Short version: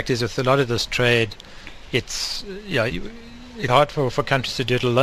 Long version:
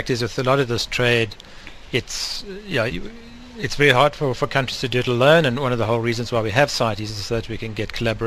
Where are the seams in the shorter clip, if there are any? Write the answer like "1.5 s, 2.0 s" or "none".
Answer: 3.7 s